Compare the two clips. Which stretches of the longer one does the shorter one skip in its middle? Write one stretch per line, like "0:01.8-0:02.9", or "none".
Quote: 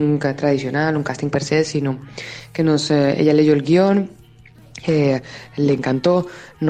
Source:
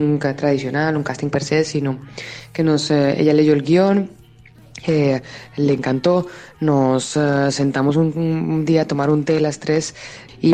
none